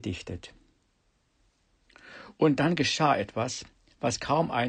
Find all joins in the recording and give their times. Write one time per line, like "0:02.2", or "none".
none